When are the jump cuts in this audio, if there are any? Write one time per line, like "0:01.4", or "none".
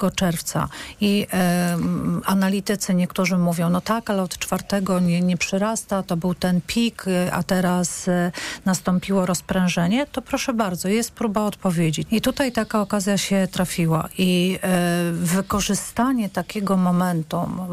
0:12.1